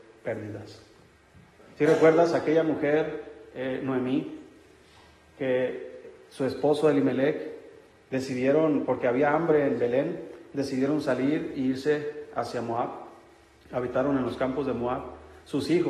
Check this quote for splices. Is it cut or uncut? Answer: uncut